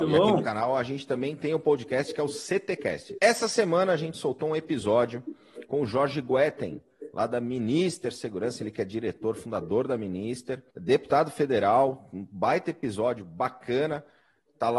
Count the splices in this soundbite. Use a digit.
2